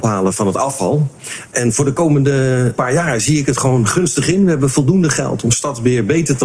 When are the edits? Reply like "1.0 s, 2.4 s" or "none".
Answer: none